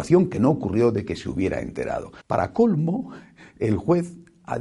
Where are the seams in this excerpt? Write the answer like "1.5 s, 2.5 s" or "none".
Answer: 2.2 s